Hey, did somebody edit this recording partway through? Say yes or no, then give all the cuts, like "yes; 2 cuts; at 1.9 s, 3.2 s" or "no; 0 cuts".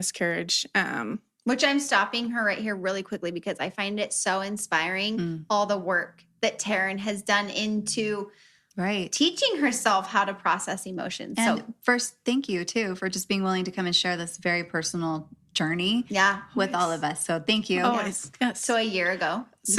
no; 0 cuts